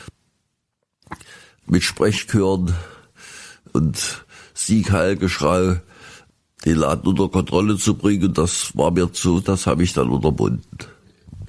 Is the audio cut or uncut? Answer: cut